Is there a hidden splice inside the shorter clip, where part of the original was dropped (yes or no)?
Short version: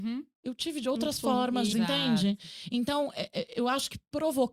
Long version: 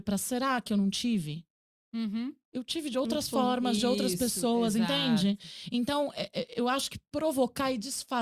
yes